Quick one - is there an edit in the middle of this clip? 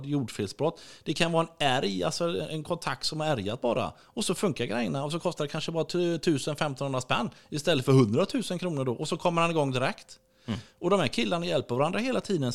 no; 0 cuts

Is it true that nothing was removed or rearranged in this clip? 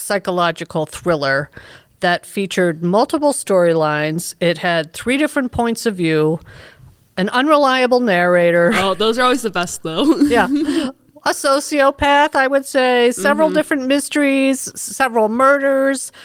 yes; 0 cuts

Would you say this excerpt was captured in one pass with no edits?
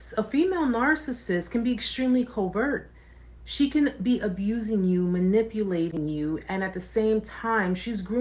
yes; 0 cuts

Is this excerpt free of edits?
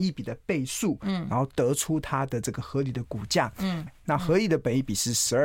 no; 1 cut; at 3.9 s

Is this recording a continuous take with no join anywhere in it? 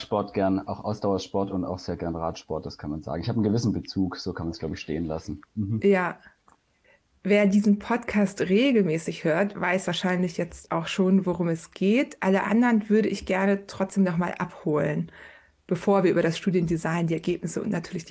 yes; 0 cuts

